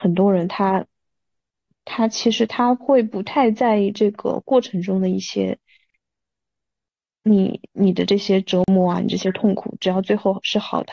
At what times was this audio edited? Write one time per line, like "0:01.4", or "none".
0:07.6